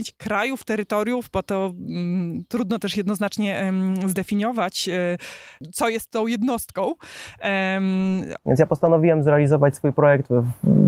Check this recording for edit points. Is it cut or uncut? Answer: cut